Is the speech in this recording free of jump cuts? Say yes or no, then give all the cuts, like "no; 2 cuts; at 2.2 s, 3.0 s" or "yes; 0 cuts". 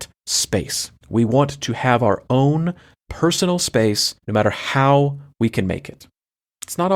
no; 2 cuts; at 1.0 s, 4.2 s